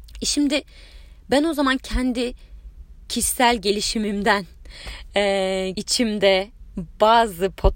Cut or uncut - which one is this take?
cut